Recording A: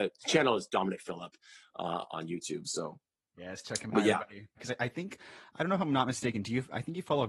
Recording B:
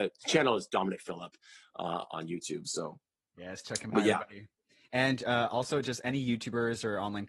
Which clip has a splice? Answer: A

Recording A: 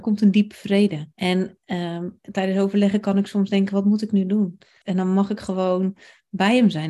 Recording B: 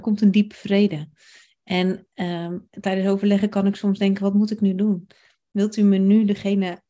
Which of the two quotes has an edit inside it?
A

